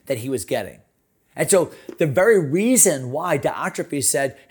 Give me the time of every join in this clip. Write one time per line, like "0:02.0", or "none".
none

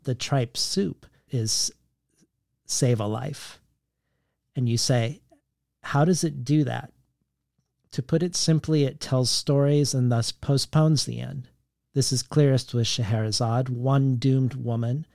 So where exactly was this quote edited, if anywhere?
0:01.3

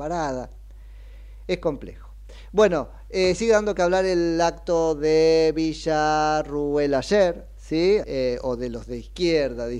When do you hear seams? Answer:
0:08.0

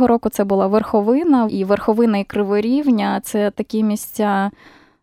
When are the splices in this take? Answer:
0:01.5

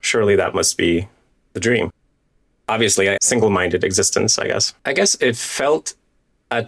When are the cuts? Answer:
0:03.2
0:04.8

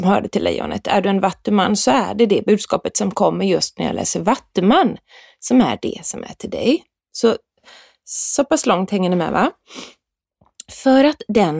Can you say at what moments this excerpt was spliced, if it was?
none

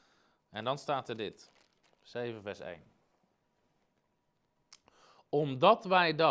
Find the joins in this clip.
none

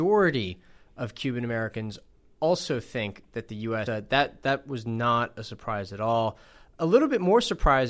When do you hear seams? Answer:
0:03.9

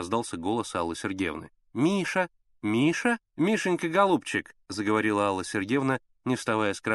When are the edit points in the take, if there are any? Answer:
0:03.3

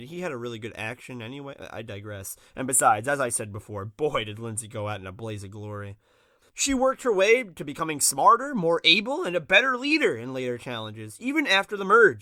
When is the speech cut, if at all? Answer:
0:06.4

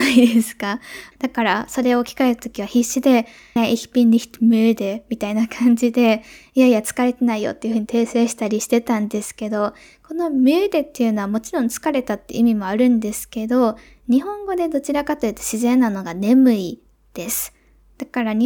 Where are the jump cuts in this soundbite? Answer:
0:01.1
0:03.6

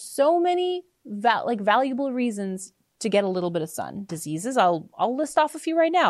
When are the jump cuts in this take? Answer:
0:04.1

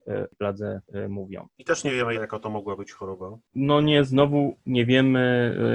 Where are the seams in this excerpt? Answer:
0:02.1

